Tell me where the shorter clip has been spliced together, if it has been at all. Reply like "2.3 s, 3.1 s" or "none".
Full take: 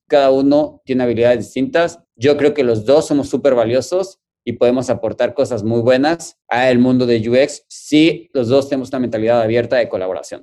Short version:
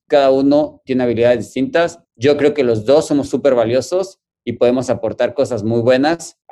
none